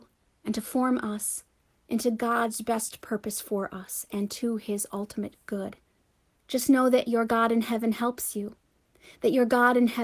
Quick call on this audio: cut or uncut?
cut